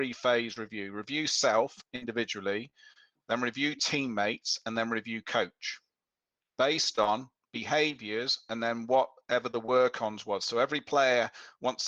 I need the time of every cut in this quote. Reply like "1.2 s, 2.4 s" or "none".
none

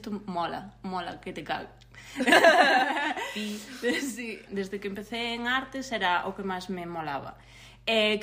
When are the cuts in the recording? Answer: 4.5 s

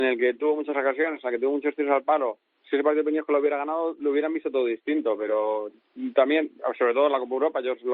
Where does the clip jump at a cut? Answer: none

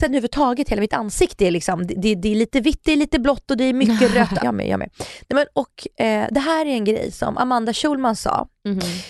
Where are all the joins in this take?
4.4 s

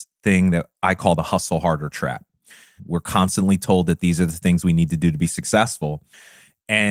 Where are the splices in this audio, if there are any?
2.8 s

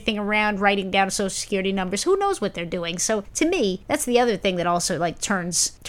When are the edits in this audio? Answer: none

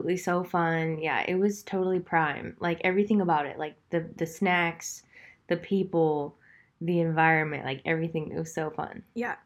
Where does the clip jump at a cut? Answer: none

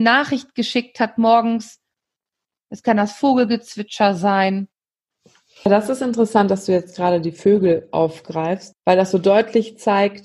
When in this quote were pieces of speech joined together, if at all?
none

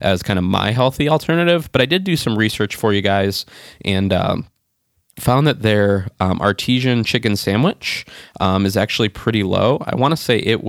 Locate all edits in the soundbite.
none

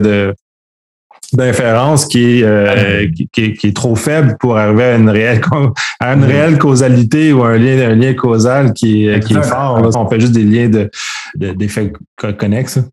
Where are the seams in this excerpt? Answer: 9.9 s, 11.4 s

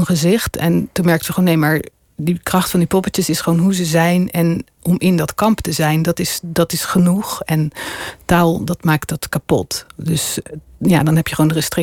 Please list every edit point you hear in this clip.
none

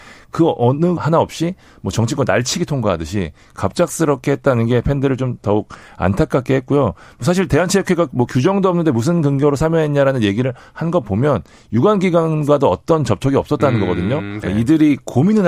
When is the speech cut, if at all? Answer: 1.0 s, 14.4 s

